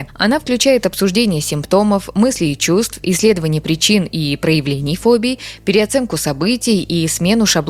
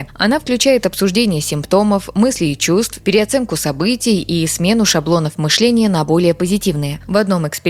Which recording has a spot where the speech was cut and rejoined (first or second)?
second